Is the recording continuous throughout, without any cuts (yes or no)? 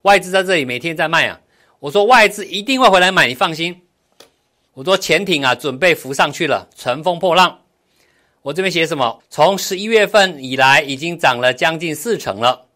no